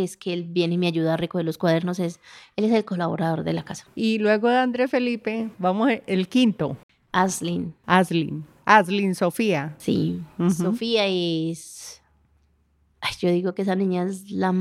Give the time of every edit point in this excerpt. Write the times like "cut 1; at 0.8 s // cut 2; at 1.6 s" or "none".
none